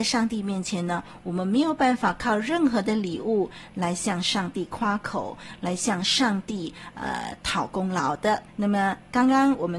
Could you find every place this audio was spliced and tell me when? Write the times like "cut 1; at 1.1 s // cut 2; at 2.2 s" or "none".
cut 1; at 8.5 s